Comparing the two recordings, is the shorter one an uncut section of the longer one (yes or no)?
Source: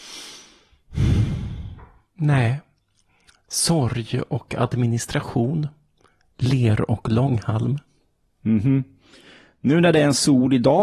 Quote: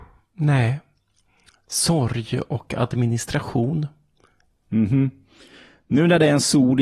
no